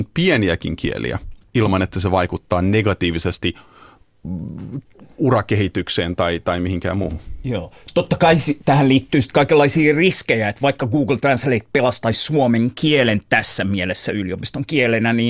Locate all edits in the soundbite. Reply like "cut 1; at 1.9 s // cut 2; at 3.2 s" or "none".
none